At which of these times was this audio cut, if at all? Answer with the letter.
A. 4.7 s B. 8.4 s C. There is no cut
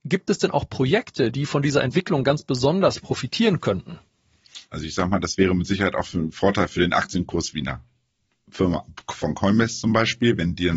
A